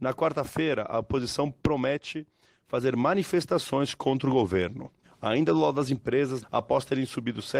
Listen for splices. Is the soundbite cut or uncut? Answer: cut